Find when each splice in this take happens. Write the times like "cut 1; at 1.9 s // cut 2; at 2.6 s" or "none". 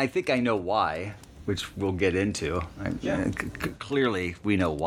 none